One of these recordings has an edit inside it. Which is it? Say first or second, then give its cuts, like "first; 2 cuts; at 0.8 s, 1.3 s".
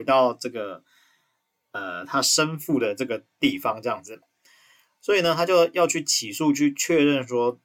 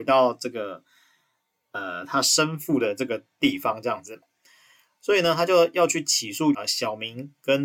second; 1 cut; at 6.5 s